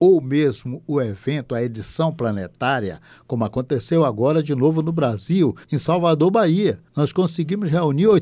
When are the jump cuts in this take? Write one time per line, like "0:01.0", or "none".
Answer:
0:05.6
0:06.9